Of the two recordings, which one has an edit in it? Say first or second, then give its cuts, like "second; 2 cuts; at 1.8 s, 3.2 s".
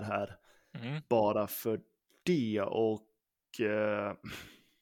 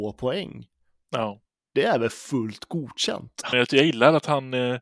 second; 1 cut; at 3.5 s